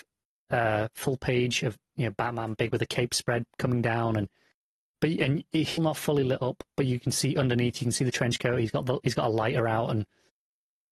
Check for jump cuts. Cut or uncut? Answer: cut